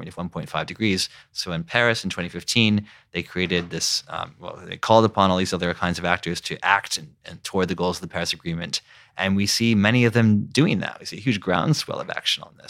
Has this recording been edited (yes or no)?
yes